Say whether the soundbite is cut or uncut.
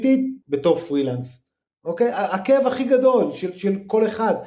uncut